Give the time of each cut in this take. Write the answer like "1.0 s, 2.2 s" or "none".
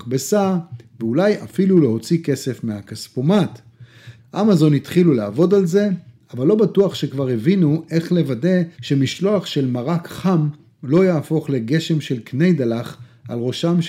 4.2 s, 8.7 s